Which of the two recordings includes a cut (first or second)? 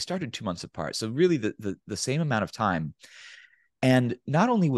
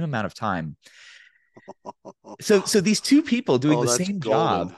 second